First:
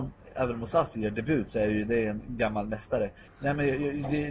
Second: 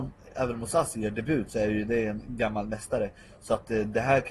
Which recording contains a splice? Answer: first; 1 cut; at 3.3 s

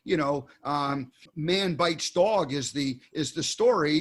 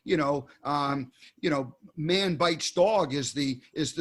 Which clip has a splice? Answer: first; 1 cut; at 1.3 s

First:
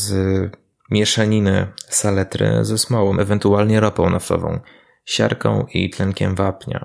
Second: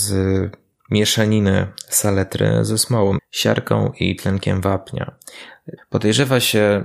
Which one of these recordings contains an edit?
second; 2 cuts; at 3.2 s, 5.8 s

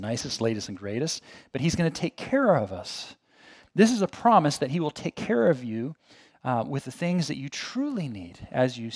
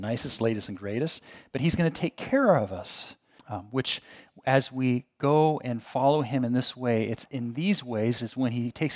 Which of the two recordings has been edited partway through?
second; 1 cut; at 3.4 s

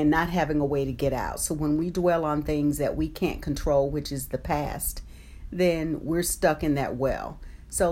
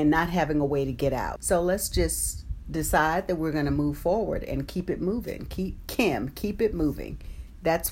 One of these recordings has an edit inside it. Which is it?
second; 1 cut; at 1.4 s

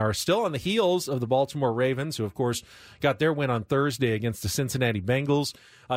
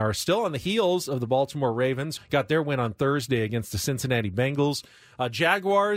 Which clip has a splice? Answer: second; 1 cut; at 2.2 s

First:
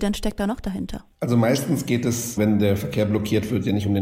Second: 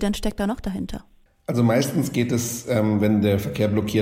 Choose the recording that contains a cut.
first; 2 cuts; at 1.1 s, 2.4 s

